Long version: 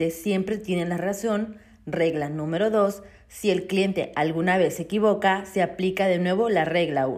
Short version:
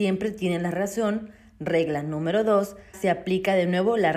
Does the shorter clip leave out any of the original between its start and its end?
yes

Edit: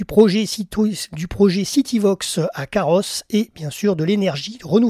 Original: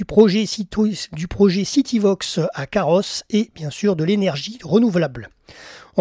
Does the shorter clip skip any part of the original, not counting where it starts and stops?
no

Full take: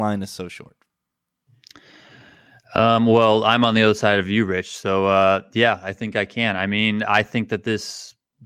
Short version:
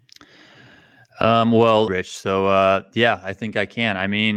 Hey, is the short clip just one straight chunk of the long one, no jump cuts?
no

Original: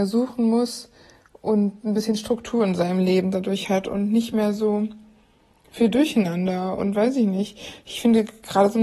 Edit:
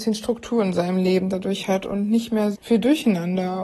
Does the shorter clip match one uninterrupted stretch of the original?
no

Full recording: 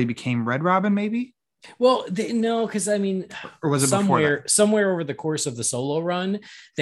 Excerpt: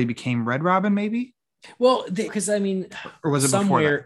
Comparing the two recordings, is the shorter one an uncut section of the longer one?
no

